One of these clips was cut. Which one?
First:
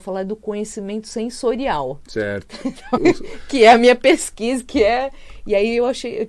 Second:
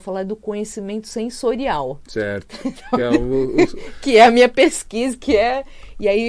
first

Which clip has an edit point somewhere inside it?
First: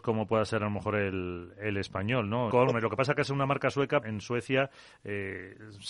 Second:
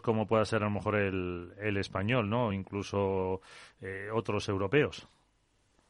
first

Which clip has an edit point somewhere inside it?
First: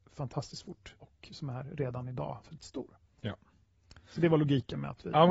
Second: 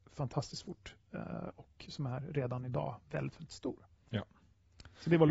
first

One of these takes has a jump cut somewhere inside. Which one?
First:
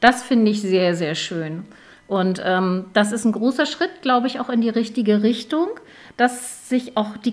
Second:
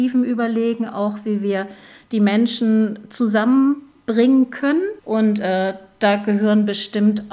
second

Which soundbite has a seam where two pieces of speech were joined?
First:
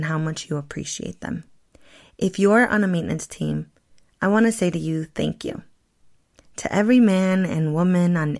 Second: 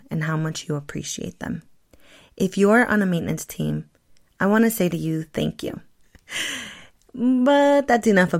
second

